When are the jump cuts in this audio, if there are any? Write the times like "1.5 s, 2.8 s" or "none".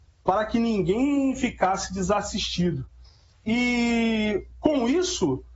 3.3 s